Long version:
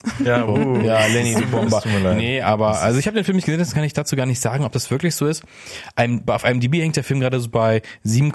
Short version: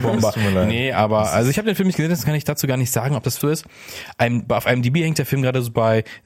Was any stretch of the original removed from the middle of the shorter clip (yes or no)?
yes